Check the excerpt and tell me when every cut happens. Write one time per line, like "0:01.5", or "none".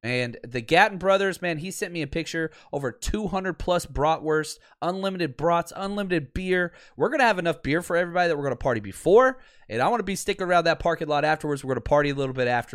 none